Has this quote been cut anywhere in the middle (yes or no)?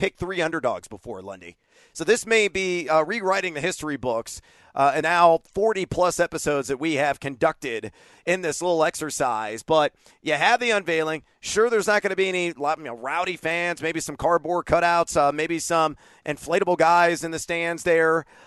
yes